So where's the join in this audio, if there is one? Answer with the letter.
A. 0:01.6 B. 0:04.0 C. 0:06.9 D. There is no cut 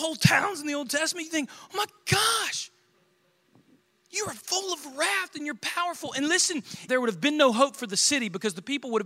C